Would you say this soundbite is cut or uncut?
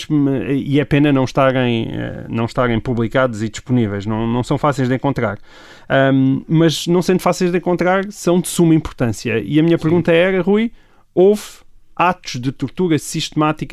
uncut